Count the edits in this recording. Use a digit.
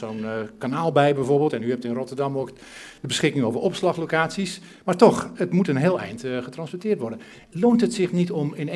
0